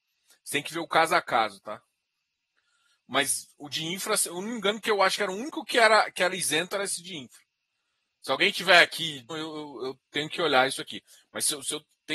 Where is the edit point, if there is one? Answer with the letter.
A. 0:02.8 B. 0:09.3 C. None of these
B